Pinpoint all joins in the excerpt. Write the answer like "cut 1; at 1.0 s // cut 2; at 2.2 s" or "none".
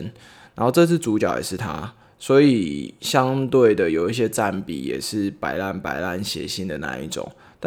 none